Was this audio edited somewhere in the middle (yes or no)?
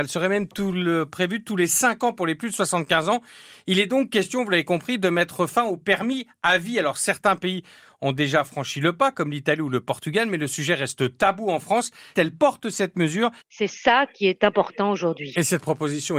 yes